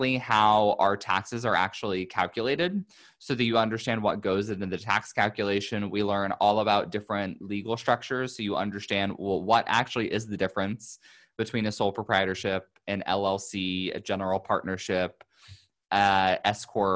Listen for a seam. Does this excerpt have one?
no; 0 cuts

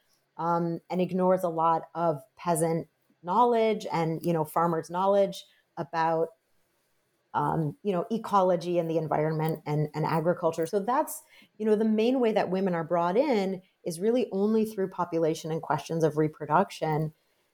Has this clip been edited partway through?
no; 0 cuts

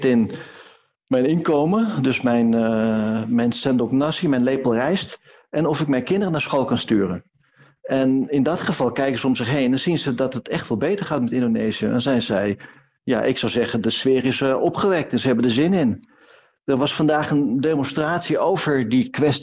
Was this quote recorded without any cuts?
yes; 0 cuts

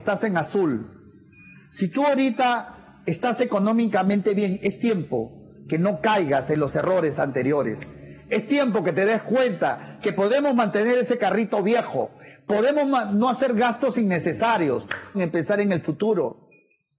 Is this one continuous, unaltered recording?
no; 1 cut; at 15.1 s

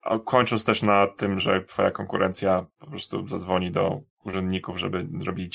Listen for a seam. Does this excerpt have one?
no; 0 cuts

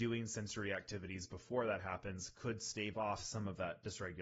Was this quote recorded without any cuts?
yes; 0 cuts

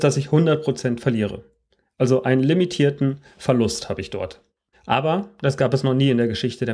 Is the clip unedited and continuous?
no; 1 cut; at 4.7 s

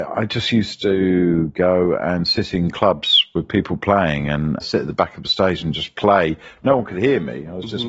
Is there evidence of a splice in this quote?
yes; 1 cut; at 4.6 s

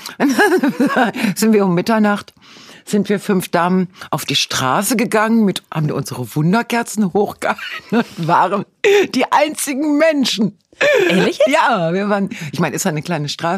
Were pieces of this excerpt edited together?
no; 0 cuts

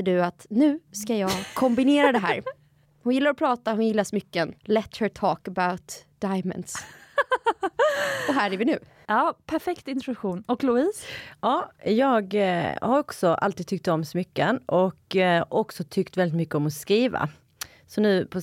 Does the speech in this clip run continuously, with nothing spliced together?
no; 1 cut; at 4.6 s

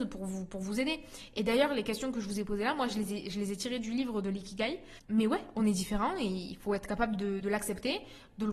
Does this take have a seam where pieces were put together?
yes; 2 cuts; at 5.0 s, 7.4 s

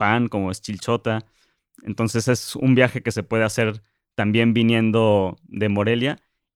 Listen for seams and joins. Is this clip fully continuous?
yes; 0 cuts

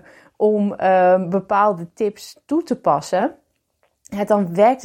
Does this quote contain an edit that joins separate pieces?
no; 0 cuts

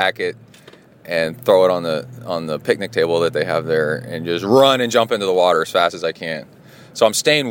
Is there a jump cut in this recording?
no; 0 cuts

